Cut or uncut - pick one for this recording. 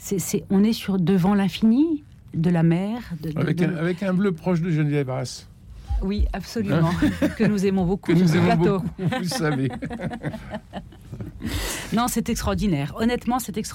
uncut